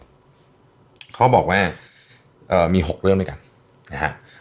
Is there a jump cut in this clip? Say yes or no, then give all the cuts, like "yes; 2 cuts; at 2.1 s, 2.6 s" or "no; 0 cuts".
no; 0 cuts